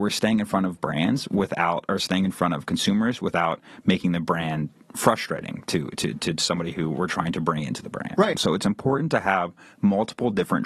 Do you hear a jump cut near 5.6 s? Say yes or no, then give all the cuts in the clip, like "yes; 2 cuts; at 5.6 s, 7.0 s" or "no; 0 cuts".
no; 1 cut; at 8.3 s